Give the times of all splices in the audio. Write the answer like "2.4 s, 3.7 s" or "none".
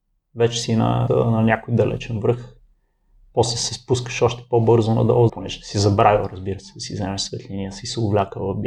1.1 s, 5.3 s